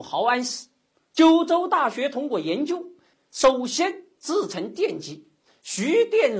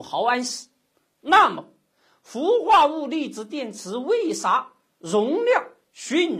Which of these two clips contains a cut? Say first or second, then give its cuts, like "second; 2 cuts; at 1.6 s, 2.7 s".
first; 2 cuts; at 1.1 s, 3.1 s